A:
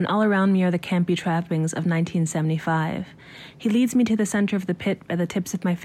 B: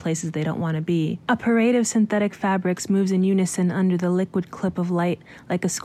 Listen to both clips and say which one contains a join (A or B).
B